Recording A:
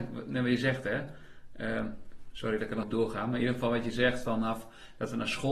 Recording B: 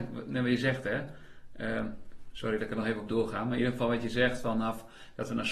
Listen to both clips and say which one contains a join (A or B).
A